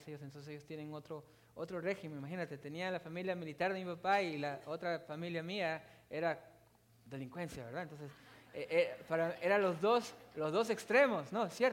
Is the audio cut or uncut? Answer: uncut